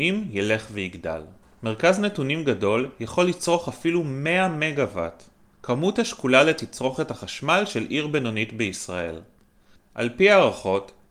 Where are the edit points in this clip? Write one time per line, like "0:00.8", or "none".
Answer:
0:01.4